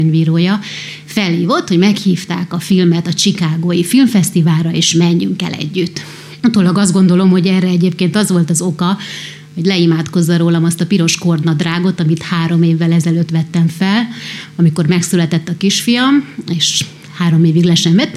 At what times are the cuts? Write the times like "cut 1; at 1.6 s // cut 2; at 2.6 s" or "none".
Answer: cut 1; at 6.4 s